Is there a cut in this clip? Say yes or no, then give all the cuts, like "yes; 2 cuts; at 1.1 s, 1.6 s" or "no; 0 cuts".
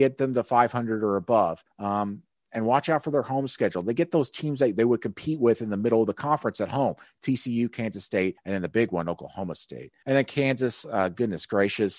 no; 0 cuts